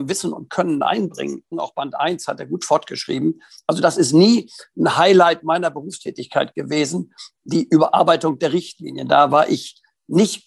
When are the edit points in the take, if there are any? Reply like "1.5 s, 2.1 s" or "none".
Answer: 1.5 s